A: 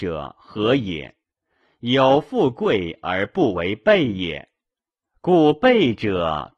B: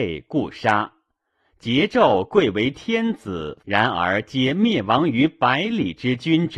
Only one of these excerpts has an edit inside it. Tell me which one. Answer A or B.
B